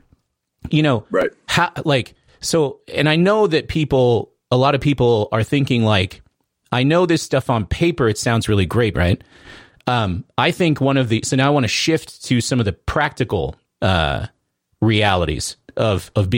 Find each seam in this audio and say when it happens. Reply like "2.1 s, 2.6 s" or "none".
8.9 s